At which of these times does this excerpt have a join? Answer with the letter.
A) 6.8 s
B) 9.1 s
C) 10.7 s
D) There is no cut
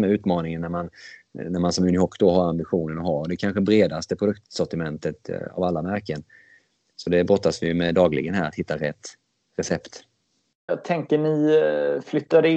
C